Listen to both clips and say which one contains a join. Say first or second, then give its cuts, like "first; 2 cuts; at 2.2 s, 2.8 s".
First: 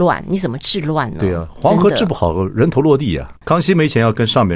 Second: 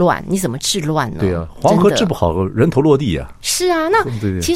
first; 1 cut; at 3.4 s